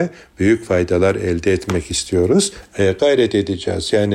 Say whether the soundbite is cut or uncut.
cut